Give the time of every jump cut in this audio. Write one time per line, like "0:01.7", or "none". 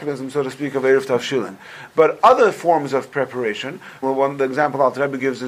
0:04.0